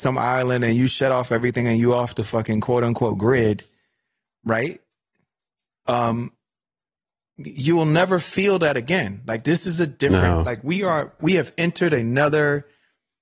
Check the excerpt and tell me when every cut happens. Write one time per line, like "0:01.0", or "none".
0:11.2